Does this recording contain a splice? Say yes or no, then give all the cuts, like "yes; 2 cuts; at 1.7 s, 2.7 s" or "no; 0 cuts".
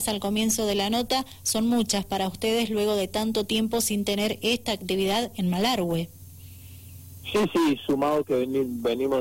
no; 0 cuts